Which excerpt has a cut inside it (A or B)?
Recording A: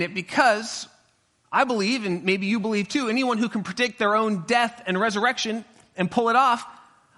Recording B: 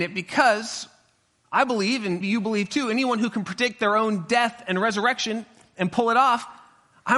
B